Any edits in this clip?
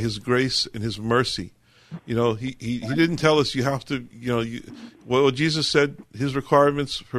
no; 0 cuts

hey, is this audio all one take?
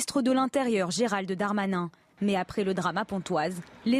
yes; 0 cuts

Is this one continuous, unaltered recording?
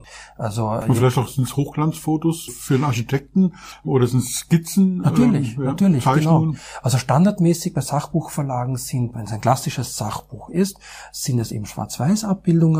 no; 1 cut; at 9.1 s

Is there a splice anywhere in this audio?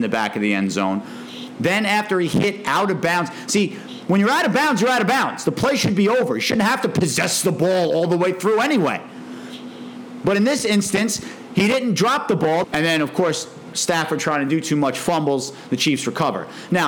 yes; 2 cuts; at 12.6 s, 13.7 s

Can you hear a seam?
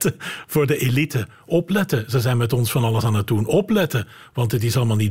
no; 0 cuts

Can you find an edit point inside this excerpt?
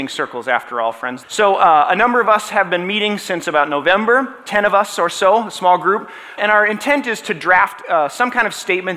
yes; 2 cuts; at 1.2 s, 6.4 s

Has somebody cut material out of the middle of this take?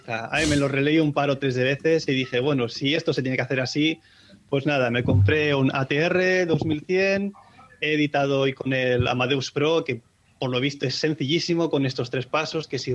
no; 0 cuts

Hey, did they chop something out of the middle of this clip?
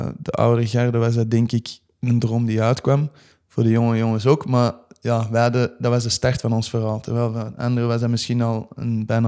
no; 0 cuts

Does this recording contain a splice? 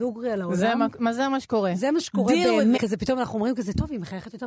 yes; 1 cut; at 2.8 s

